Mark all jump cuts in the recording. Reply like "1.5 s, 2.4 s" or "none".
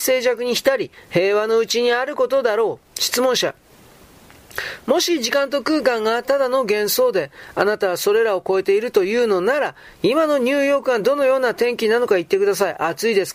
none